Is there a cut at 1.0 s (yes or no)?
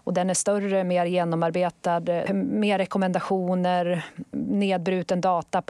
no